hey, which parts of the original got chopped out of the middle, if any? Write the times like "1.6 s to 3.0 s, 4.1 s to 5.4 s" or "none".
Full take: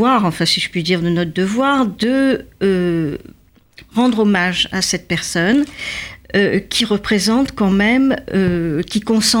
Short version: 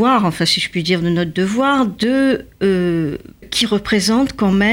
3.4 s to 6.6 s